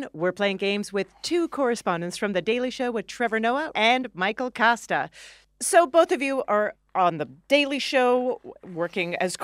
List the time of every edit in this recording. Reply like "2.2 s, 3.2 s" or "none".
3.7 s